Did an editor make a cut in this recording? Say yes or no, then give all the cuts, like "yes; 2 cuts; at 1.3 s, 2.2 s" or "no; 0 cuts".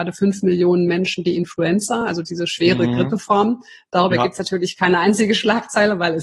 no; 0 cuts